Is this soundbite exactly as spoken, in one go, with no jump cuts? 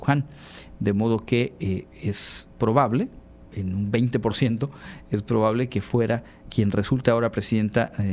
no; 2 cuts; at 3.5 s, 6.4 s

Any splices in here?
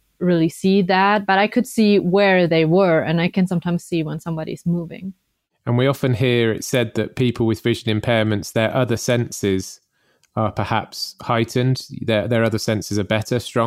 yes; 1 cut; at 3.5 s

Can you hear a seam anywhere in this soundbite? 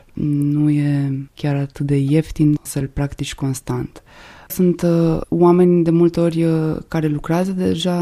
no; 0 cuts

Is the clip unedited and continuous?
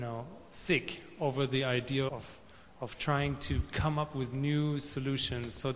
no; 1 cut; at 2.1 s

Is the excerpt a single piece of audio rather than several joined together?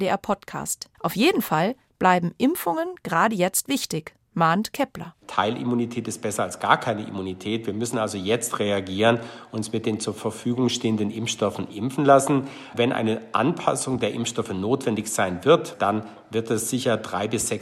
no; 1 cut; at 0.9 s

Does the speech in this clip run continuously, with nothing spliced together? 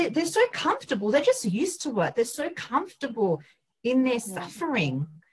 yes; 0 cuts

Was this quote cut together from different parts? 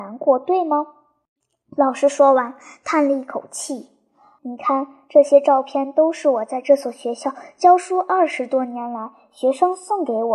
yes; 1 cut; at 4.4 s

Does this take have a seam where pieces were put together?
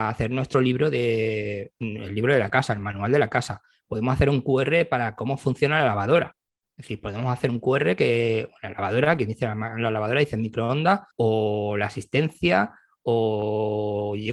yes; 1 cut; at 11.1 s

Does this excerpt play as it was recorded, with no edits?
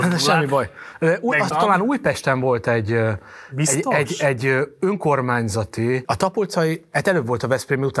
no; 2 cuts; at 1.5 s, 6.0 s

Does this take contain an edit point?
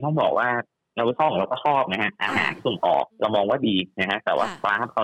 yes; 1 cut; at 3.1 s

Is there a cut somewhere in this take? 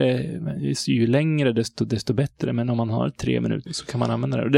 yes; 1 cut; at 3.7 s

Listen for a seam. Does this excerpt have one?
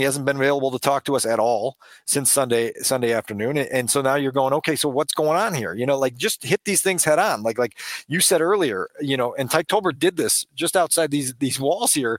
no; 0 cuts

